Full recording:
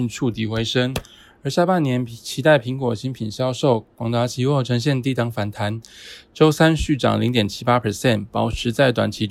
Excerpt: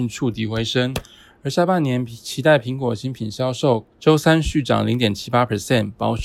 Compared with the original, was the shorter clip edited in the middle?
yes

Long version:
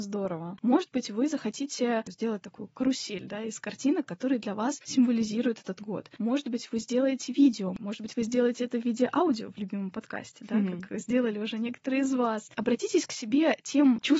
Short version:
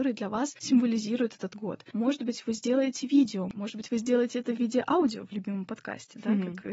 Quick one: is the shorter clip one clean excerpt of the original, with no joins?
yes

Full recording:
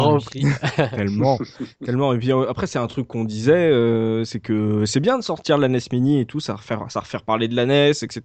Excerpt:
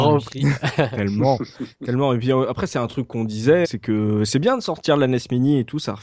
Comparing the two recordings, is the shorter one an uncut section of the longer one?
no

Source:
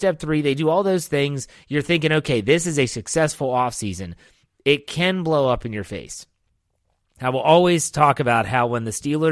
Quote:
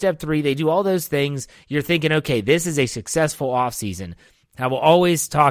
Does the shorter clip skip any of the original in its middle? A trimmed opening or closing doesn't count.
yes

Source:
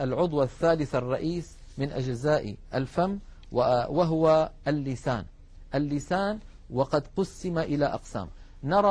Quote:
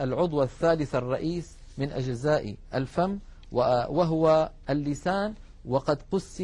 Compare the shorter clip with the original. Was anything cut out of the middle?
yes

